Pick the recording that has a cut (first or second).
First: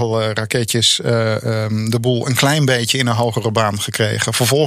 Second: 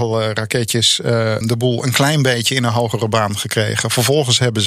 second